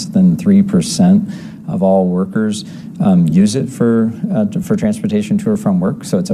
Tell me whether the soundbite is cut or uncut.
uncut